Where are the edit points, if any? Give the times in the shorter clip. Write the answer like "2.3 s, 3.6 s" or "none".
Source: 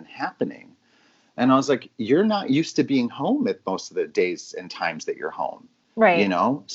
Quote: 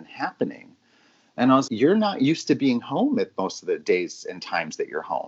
1.7 s